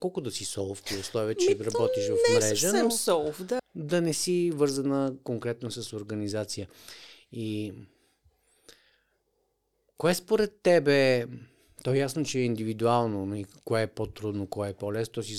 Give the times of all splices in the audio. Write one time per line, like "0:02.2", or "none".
0:03.6